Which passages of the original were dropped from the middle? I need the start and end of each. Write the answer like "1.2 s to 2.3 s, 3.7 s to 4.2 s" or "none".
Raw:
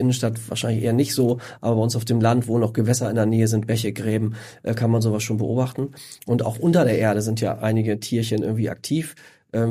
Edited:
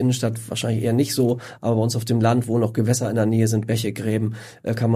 none